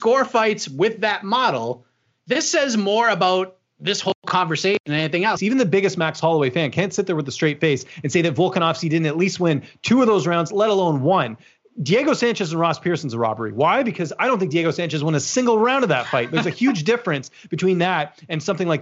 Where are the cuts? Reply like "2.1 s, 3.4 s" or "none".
5.4 s